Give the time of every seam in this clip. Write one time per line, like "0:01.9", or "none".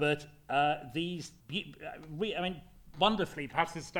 0:01.4